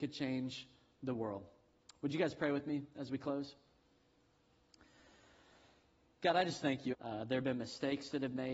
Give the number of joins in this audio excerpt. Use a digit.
1